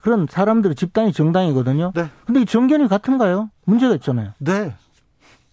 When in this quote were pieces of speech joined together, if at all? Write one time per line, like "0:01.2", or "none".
0:03.6